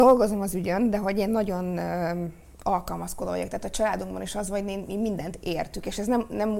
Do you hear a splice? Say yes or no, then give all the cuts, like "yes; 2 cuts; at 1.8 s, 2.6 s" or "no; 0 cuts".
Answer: no; 0 cuts